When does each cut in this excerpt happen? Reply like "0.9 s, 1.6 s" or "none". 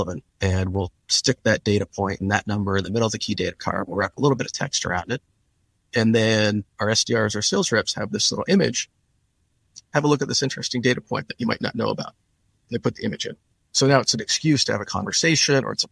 9.8 s